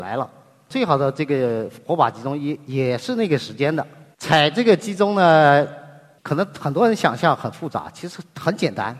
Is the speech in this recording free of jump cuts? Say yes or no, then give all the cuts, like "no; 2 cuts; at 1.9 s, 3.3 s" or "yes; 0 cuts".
yes; 0 cuts